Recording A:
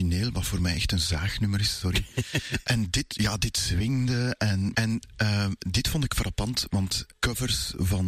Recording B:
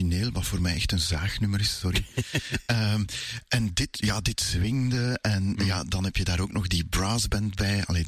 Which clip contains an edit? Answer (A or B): A